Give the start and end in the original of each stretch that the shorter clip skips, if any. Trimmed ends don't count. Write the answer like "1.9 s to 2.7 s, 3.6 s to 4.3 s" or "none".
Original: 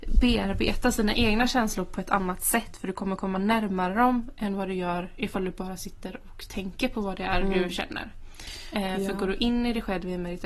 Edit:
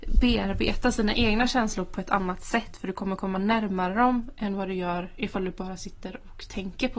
none